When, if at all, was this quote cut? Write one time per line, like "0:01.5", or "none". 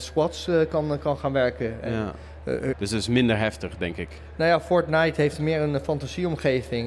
0:02.7